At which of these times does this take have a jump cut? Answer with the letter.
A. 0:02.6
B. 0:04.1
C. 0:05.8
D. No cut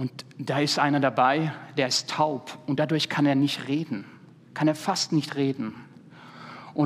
D